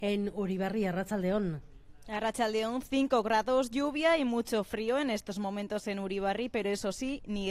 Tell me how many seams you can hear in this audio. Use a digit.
0